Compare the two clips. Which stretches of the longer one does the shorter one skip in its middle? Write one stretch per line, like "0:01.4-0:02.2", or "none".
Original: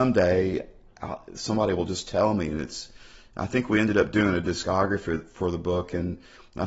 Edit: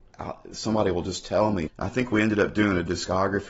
0:02.5-0:03.2